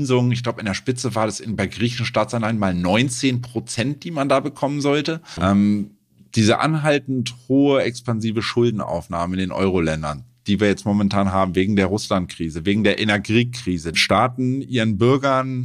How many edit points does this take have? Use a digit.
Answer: 2